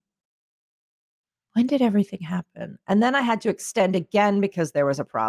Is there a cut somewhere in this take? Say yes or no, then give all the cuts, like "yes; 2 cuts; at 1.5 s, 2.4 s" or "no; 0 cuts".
no; 0 cuts